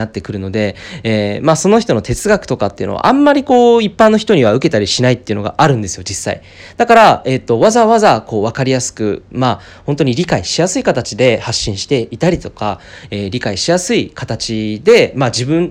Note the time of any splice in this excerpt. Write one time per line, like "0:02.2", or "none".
none